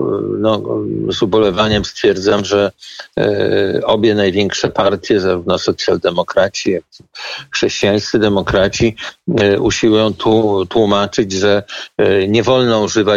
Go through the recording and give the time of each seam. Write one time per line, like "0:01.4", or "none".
none